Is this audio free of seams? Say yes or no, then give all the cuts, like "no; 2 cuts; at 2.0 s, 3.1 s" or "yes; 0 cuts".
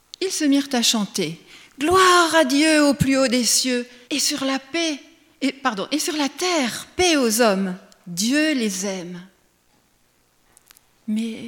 no; 1 cut; at 4.0 s